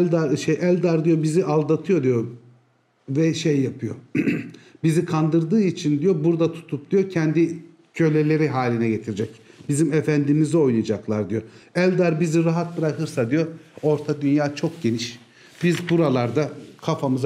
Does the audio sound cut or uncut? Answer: uncut